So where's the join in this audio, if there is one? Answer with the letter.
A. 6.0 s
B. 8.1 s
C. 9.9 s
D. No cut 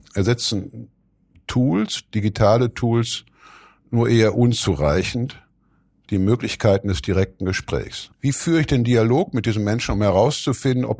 B